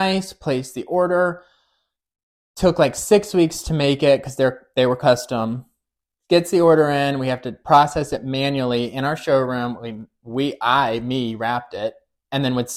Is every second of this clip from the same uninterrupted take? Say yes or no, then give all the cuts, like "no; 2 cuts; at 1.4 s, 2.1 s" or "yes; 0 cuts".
yes; 0 cuts